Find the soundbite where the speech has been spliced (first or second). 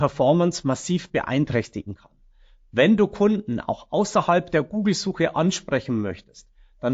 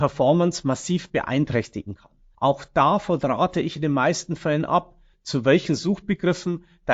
second